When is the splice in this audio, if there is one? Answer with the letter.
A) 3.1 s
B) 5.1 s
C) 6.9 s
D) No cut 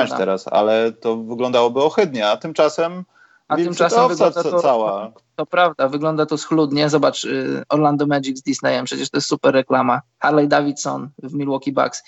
B